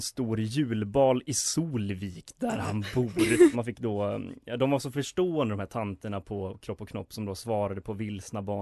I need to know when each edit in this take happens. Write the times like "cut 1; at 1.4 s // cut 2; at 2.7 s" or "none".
cut 1; at 3.5 s